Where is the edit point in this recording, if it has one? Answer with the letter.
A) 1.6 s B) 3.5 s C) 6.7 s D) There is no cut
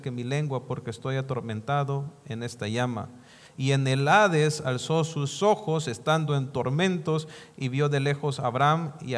B